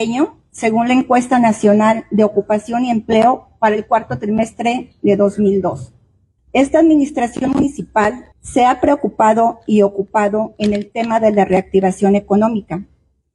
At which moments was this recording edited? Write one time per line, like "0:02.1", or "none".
0:06.4
0:08.3